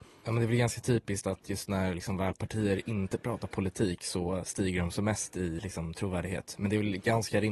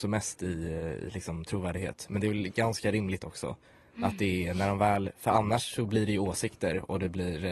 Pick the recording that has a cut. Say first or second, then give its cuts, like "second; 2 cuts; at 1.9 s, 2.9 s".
first; 1 cut; at 5.6 s